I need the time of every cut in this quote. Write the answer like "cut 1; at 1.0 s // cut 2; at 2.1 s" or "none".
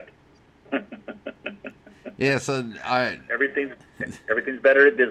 none